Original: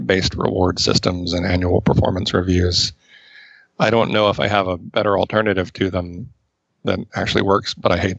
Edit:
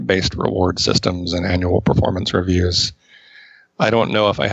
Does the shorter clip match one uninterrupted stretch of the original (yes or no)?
yes